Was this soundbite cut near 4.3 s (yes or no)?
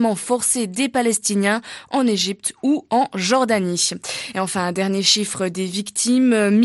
no